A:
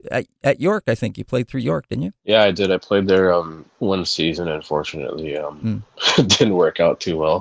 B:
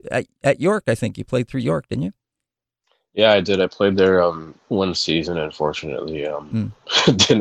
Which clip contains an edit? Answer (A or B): A